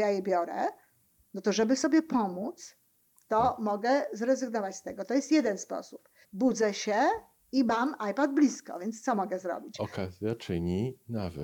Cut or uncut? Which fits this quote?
cut